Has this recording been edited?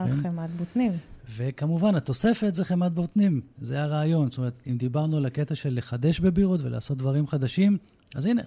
no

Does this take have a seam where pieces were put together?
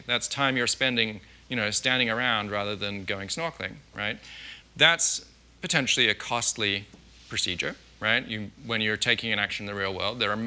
yes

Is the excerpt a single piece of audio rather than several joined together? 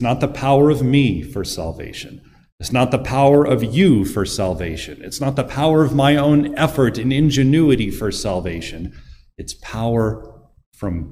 yes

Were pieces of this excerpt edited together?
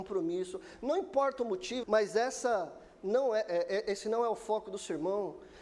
yes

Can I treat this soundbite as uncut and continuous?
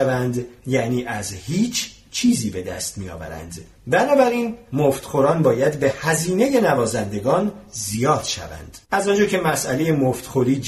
no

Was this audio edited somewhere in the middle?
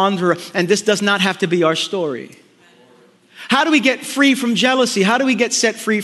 no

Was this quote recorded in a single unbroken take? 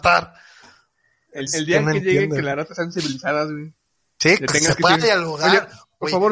no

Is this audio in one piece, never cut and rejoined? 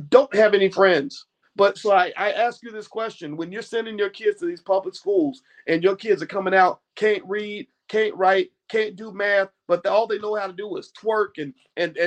no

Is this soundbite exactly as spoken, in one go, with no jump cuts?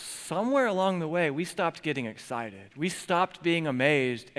yes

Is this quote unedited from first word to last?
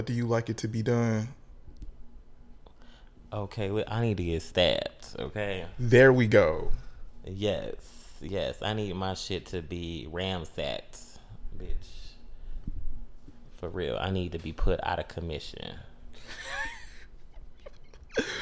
yes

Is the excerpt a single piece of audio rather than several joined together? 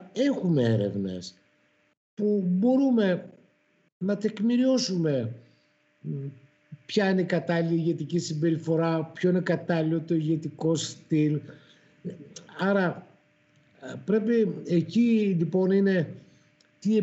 yes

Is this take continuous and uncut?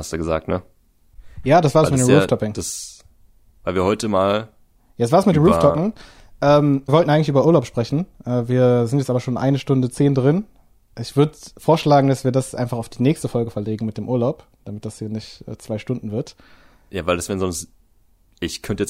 no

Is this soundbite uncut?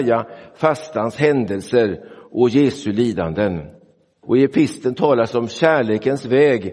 no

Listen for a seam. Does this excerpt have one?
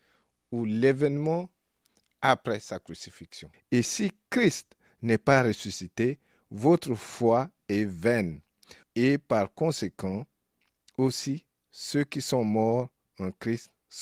yes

